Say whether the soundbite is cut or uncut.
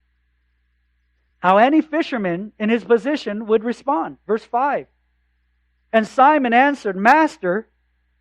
uncut